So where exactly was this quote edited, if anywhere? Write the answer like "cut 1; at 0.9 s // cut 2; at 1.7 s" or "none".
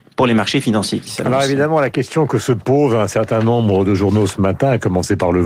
none